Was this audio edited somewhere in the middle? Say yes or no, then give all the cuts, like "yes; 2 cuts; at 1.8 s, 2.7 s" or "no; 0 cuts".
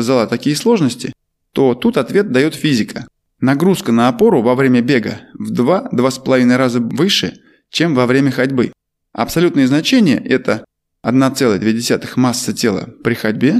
no; 0 cuts